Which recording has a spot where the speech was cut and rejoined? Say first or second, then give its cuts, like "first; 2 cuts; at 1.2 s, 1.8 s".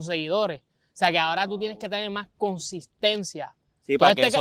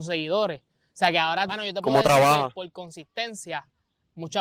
second; 1 cut; at 1.5 s